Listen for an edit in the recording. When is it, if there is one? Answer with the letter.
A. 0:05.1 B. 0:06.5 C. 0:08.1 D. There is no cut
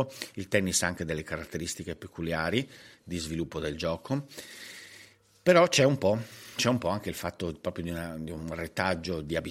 D